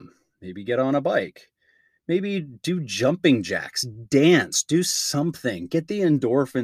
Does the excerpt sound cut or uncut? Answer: uncut